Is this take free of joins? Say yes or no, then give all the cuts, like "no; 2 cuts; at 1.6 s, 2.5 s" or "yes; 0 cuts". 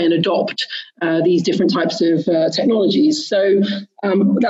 yes; 0 cuts